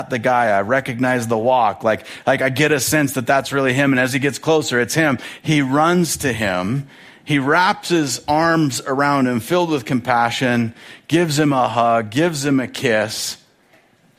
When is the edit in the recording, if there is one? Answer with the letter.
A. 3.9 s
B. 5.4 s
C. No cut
C